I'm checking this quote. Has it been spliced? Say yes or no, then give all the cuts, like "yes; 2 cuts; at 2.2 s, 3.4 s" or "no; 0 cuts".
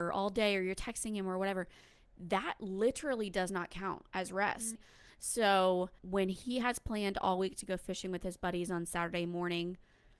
yes; 2 cuts; at 4.7 s, 6.0 s